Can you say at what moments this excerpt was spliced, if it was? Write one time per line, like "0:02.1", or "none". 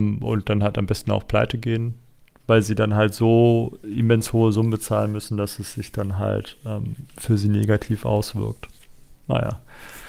none